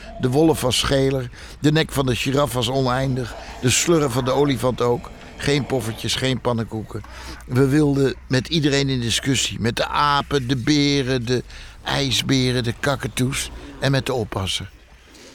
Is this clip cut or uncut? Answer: cut